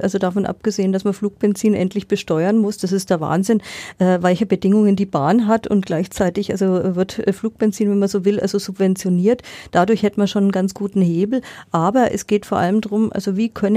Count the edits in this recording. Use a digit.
0